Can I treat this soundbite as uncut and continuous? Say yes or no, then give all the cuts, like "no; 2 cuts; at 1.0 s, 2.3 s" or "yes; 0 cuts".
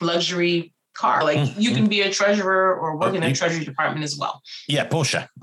yes; 0 cuts